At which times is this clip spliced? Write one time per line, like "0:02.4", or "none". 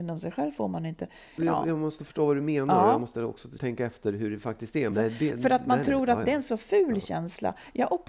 0:01.4
0:03.6
0:04.9